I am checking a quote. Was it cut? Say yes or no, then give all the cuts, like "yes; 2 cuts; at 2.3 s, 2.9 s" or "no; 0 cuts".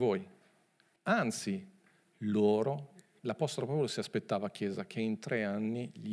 yes; 2 cuts; at 1.0 s, 3.2 s